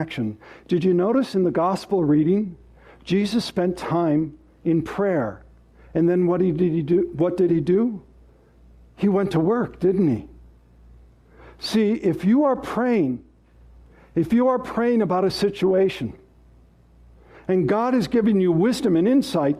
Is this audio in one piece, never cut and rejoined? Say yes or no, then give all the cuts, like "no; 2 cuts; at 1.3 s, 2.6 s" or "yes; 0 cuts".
yes; 0 cuts